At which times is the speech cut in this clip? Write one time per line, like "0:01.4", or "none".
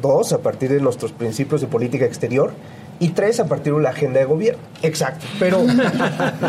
0:04.8